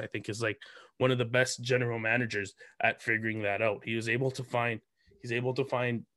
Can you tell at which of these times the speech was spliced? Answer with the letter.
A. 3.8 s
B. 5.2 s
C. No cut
C